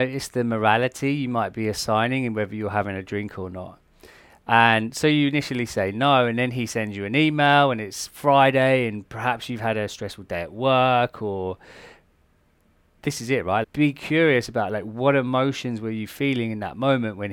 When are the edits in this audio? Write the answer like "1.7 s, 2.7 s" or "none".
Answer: 13.6 s

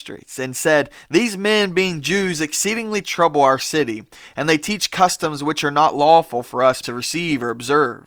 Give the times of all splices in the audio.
6.8 s

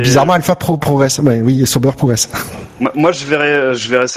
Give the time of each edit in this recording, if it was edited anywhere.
none

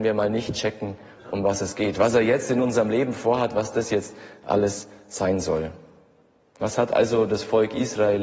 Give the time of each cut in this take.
none

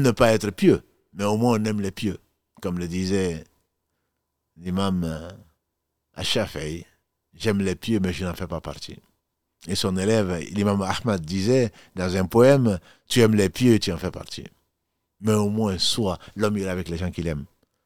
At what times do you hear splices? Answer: none

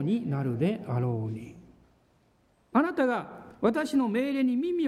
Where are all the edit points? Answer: 2.7 s

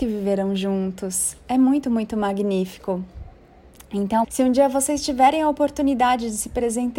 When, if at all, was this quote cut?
4.2 s

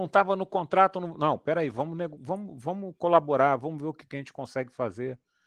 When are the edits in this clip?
none

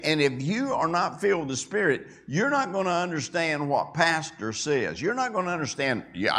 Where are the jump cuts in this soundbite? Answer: none

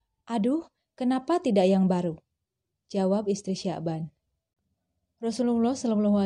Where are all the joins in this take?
2.7 s

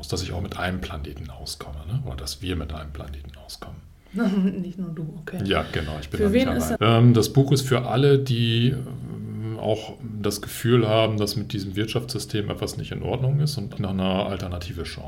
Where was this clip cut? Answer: 6.8 s, 13.8 s

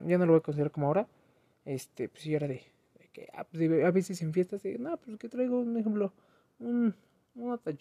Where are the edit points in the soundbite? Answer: none

